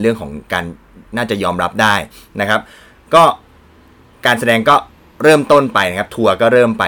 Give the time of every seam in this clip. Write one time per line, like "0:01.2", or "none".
none